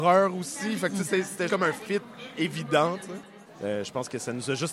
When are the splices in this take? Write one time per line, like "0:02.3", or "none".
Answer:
0:01.5
0:03.5